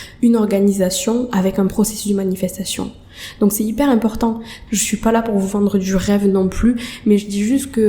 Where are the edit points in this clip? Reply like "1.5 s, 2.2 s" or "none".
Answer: 4.7 s